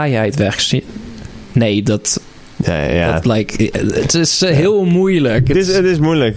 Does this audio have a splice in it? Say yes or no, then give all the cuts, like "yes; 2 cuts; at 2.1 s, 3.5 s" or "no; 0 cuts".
no; 0 cuts